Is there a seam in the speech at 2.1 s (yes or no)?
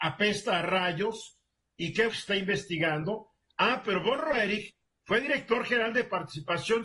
yes